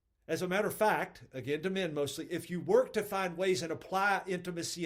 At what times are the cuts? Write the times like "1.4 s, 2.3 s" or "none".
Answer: none

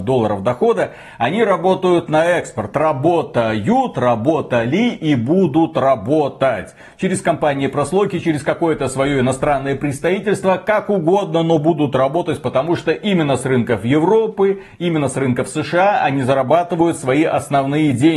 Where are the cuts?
none

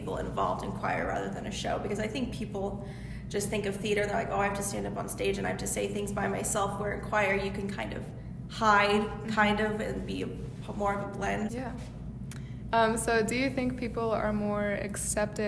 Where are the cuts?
11.5 s, 12.7 s

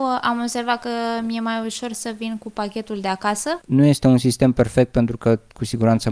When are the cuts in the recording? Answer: 3.6 s

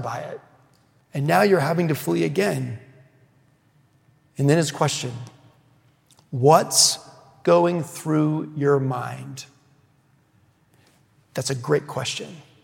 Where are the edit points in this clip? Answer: 1.0 s

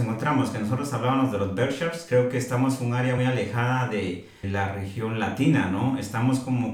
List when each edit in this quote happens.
3.2 s, 4.4 s

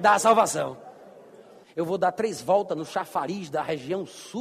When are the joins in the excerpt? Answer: 1.6 s

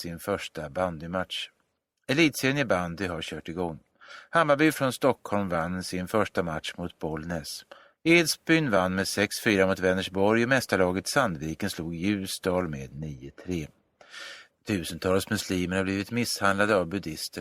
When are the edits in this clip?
7.9 s, 14.5 s

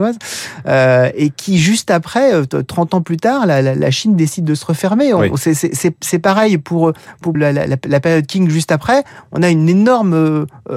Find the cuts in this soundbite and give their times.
7.3 s

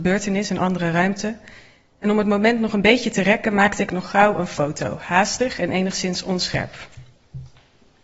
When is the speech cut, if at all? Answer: none

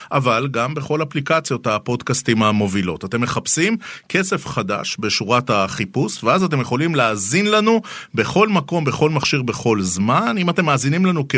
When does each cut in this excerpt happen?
none

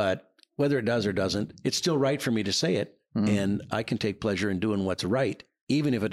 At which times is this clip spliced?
none

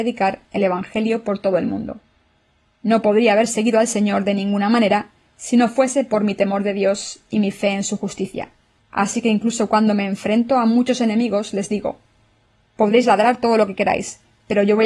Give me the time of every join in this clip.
8.8 s

